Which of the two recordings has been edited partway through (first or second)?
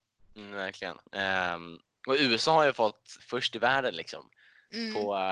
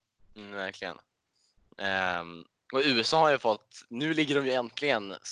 first